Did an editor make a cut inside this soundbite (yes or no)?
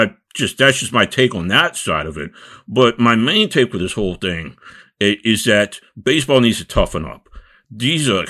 no